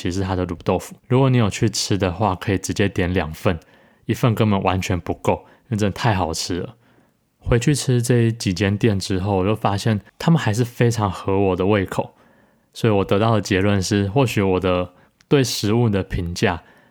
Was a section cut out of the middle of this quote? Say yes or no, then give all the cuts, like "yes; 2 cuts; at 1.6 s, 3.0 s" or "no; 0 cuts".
yes; 1 cut; at 1.0 s